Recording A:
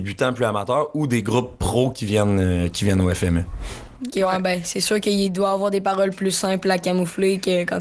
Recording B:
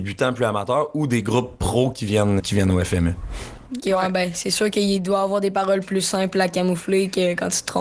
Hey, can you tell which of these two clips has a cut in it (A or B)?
B